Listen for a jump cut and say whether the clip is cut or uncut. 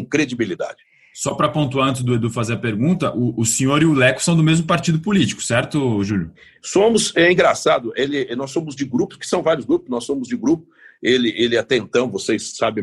uncut